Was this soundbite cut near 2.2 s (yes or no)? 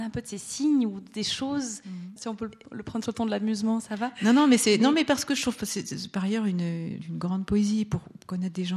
yes